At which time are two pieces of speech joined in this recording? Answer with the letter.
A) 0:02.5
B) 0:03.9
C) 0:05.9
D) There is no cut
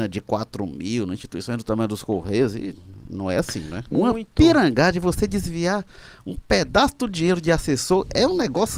B